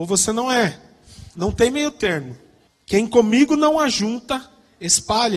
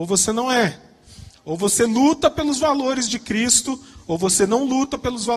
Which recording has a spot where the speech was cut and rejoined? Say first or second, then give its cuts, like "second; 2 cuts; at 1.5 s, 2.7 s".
first; 2 cuts; at 1.3 s, 2.7 s